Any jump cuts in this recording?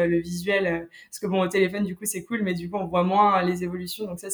no; 0 cuts

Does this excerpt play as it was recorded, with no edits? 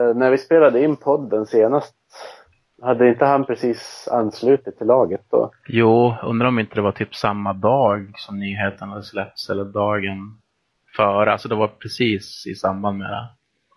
yes; 0 cuts

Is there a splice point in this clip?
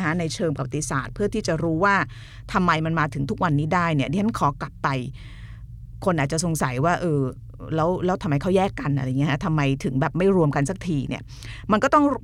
no; 0 cuts

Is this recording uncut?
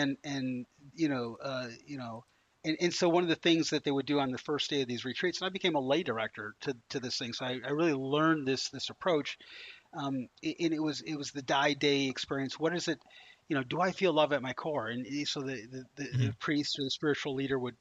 yes; 0 cuts

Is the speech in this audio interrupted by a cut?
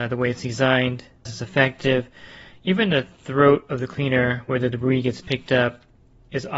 yes; 1 cut; at 1.3 s

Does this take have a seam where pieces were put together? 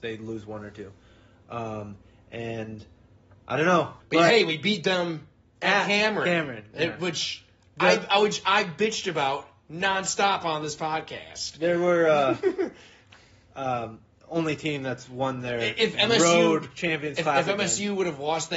yes; 1 cut; at 4.0 s

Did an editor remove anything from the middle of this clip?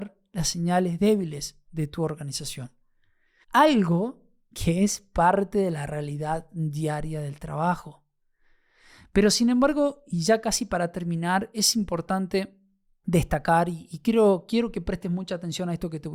yes; 1 cut; at 3.4 s

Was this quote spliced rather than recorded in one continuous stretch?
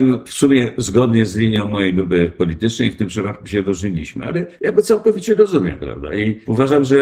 no; 0 cuts

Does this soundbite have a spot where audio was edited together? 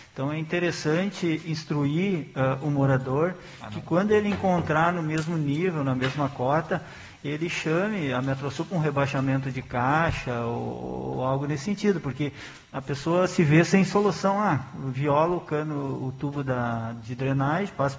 no; 0 cuts

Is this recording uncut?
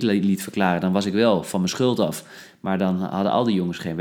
yes; 0 cuts

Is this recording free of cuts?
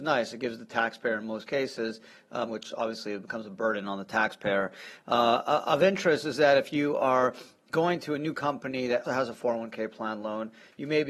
no; 2 cuts; at 2.5 s, 9.0 s

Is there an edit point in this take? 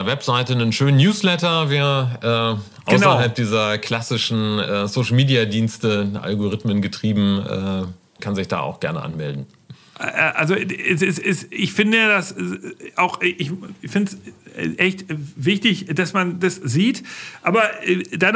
yes; 1 cut; at 8.2 s

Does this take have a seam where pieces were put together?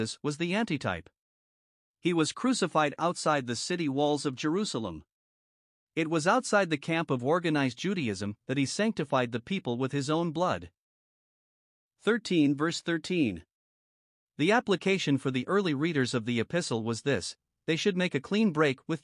no; 0 cuts

